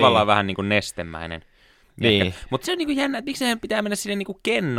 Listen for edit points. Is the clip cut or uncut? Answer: cut